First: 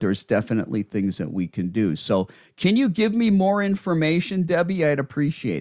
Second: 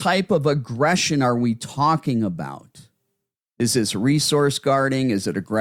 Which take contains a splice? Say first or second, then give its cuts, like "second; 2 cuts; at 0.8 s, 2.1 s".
second; 1 cut; at 3.5 s